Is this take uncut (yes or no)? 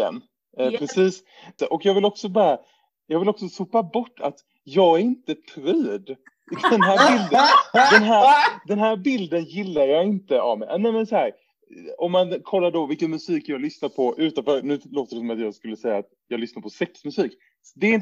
no